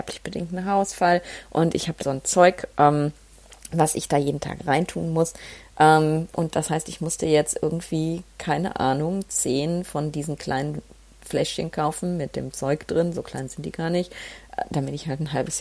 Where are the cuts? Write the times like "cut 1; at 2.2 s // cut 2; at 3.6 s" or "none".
cut 1; at 2.0 s